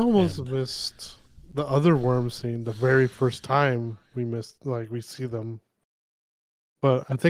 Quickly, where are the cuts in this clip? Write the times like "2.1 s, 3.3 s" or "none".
none